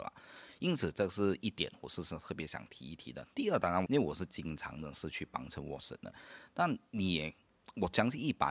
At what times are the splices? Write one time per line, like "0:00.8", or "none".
0:03.9